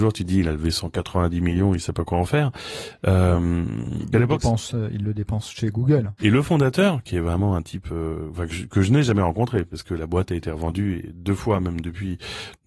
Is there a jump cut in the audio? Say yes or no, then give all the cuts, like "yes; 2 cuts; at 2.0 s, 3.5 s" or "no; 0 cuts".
yes; 2 cuts; at 4.1 s, 6.2 s